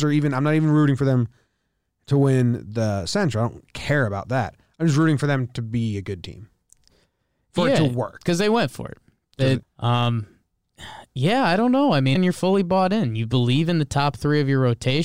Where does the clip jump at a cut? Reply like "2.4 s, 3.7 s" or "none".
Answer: 9.6 s, 12.2 s